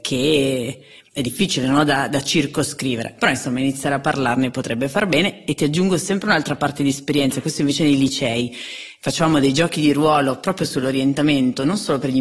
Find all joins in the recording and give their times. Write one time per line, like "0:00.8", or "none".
none